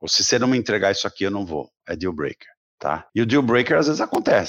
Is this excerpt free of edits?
no; 1 cut; at 3.1 s

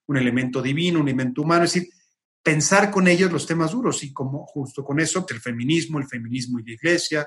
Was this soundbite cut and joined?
yes; 1 cut; at 5.3 s

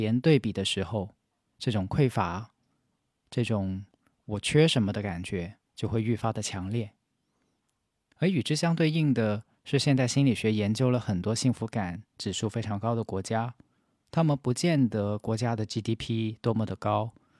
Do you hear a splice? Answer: yes; 1 cut; at 5.7 s

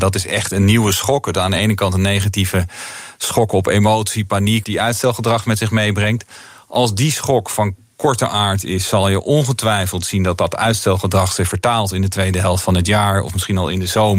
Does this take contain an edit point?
yes; 1 cut; at 4.6 s

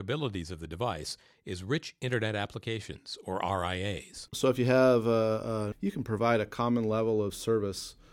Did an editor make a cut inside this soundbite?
yes; 2 cuts; at 4.3 s, 5.7 s

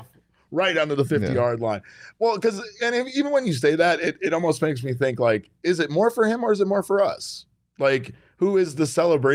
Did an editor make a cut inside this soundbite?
no; 0 cuts

